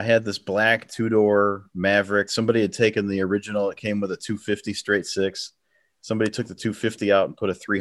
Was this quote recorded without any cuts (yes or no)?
yes